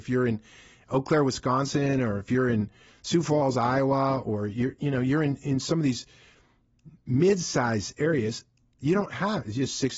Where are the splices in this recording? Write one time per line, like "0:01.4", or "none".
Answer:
none